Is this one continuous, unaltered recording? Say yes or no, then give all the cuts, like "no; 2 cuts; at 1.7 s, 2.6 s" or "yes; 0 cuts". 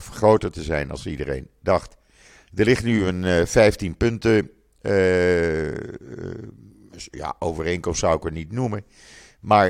yes; 0 cuts